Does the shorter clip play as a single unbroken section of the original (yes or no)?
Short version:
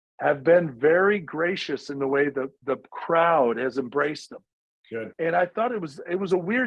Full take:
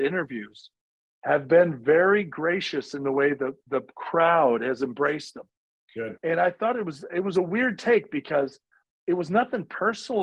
yes